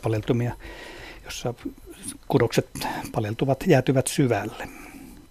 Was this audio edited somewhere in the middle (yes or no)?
no